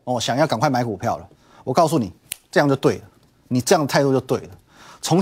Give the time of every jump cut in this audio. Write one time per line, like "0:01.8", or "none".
none